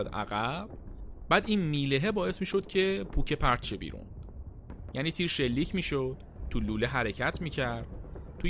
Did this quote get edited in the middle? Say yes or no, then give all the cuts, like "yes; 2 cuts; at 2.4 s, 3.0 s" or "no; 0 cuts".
yes; 1 cut; at 4.9 s